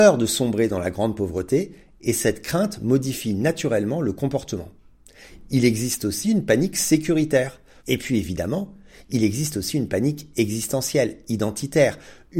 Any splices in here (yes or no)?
yes